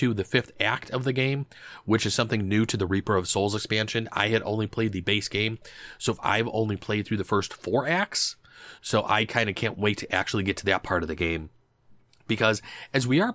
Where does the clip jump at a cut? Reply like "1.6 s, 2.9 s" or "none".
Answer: 8.8 s